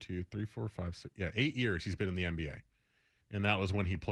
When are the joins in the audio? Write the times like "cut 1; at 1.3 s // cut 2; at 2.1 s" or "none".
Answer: cut 1; at 3.2 s

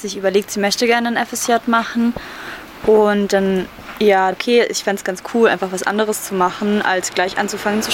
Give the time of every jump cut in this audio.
cut 1; at 4.3 s

